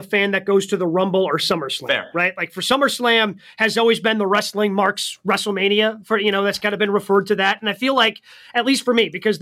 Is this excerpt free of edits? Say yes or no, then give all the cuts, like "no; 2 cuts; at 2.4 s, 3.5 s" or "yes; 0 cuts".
yes; 0 cuts